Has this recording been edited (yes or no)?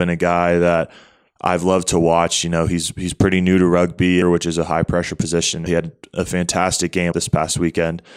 yes